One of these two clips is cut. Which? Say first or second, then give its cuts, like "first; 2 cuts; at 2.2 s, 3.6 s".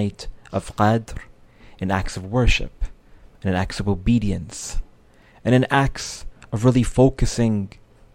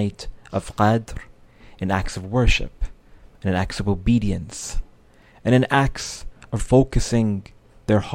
second; 1 cut; at 6.6 s